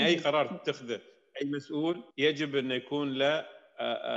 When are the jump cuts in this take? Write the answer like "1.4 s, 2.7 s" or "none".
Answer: 2.1 s